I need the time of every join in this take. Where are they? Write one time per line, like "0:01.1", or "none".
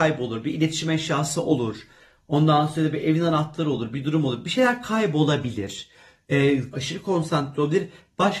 0:06.7

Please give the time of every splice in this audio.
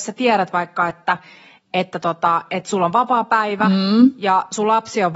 none

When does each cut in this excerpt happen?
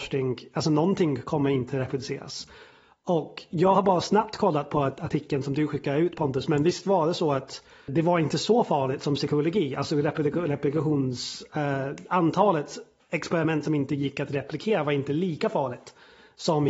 0:07.9

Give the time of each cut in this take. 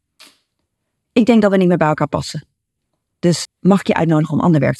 0:03.5

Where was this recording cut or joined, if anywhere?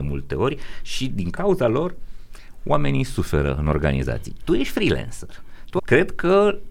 0:05.8

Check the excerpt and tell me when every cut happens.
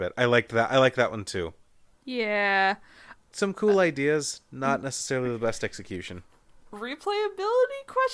0:01.9
0:03.2

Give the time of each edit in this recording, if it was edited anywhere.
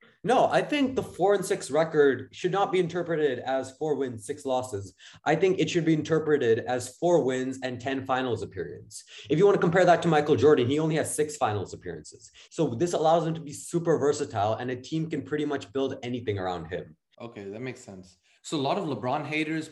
0:12.5
0:17.1
0:18.4

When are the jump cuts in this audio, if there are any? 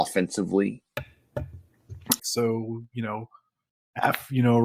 0:02.2

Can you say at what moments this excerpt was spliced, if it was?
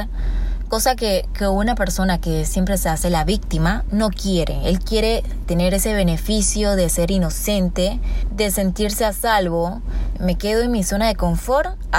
0:05.4

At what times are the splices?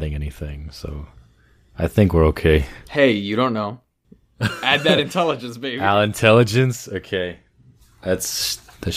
none

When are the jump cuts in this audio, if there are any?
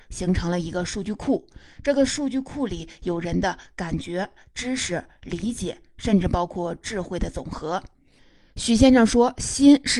none

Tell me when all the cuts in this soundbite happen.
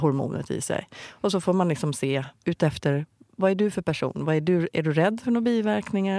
0:02.4

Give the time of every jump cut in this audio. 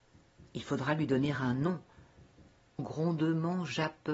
0:02.8

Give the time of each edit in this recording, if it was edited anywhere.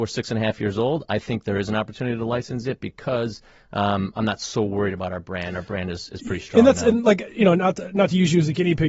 none

